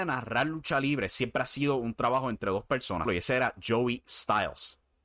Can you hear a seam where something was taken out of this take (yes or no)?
yes